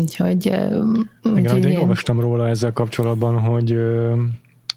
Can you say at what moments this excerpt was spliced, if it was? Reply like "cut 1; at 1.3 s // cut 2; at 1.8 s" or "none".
cut 1; at 1.2 s